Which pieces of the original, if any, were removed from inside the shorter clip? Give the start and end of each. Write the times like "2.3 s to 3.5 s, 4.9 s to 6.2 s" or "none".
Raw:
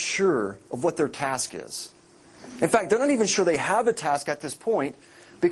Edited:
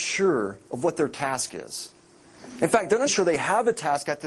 3.1 s to 3.3 s